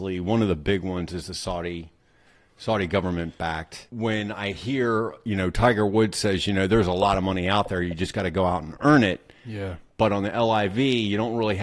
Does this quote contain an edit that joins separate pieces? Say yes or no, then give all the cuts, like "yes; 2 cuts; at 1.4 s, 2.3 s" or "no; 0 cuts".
yes; 1 cut; at 3.9 s